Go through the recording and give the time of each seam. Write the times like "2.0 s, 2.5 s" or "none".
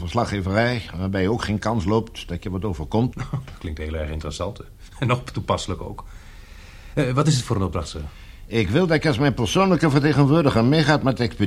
3.1 s